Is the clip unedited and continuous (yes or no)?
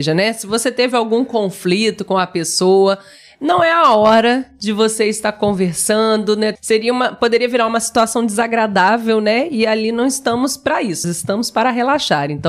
no